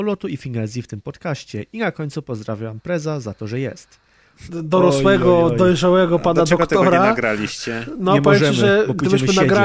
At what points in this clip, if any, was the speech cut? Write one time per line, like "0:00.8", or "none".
0:04.5